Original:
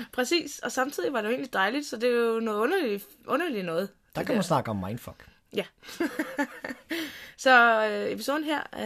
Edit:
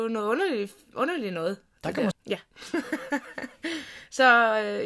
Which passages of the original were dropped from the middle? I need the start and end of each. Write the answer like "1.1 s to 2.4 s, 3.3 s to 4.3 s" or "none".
4.4 s to 5.4 s

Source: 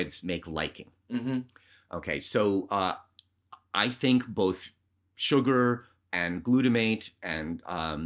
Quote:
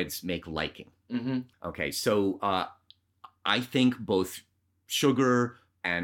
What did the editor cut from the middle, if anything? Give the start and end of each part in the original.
1.5 s to 1.8 s

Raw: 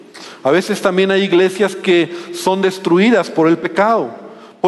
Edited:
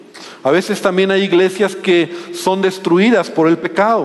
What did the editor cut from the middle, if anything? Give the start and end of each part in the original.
none

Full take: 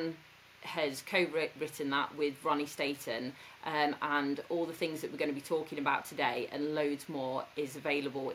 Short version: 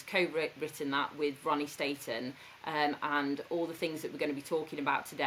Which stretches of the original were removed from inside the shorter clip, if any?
none

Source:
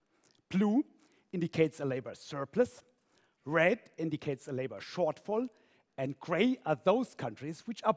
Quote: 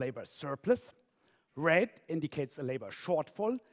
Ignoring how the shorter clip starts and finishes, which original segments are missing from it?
none

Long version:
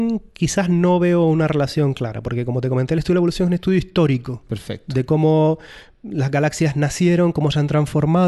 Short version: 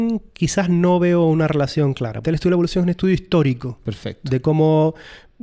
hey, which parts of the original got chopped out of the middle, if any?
2.2 s to 2.9 s

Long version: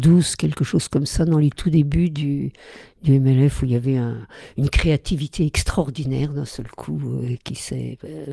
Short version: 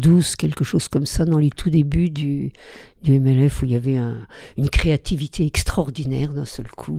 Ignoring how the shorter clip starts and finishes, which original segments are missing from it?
none

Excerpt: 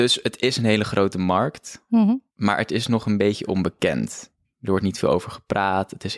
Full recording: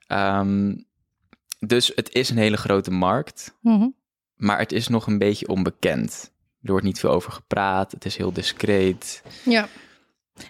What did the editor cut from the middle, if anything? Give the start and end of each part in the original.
4.0 s to 4.3 s

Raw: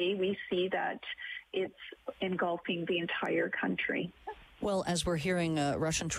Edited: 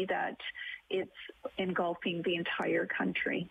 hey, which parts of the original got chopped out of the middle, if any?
none

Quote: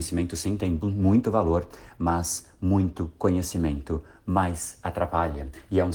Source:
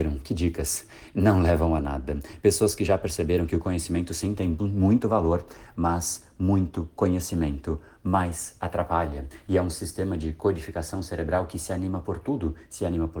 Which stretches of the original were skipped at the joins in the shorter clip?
none

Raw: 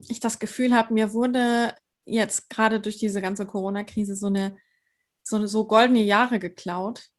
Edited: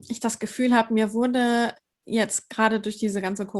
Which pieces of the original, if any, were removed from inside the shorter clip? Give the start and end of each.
none

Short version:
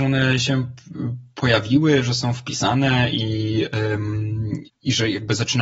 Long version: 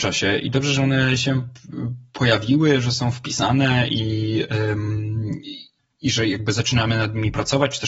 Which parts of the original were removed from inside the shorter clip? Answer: 5.4 s to 5.8 s

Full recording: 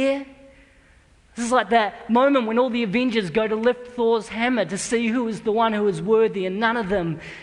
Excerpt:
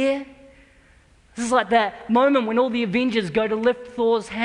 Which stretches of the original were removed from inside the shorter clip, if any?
none

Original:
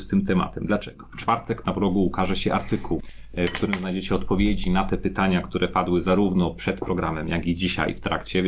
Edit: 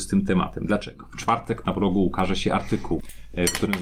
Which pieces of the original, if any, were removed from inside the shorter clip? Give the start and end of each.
none

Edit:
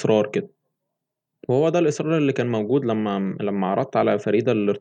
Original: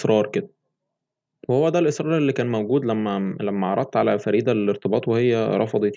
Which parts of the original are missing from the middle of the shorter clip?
none

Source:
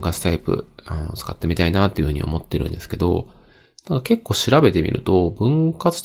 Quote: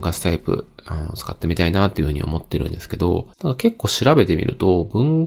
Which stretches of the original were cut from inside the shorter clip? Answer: 3.3 s to 3.8 s

